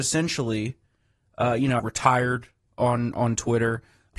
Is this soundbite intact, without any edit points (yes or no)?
no